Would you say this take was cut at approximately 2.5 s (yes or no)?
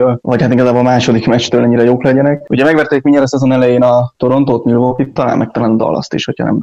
no